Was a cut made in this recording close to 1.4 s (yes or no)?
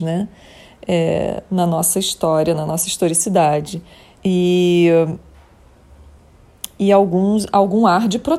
no